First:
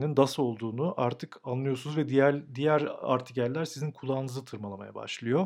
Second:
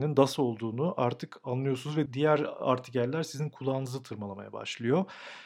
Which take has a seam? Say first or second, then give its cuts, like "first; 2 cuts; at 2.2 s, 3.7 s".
second; 1 cut; at 2.1 s